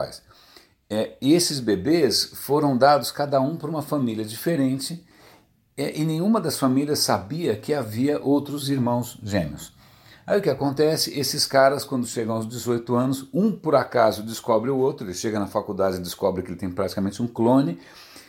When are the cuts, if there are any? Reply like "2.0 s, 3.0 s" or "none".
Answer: none